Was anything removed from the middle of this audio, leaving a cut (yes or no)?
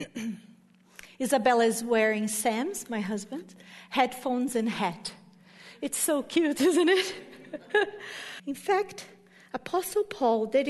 yes